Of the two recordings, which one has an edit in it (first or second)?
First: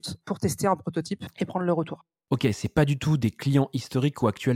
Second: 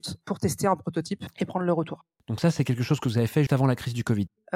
second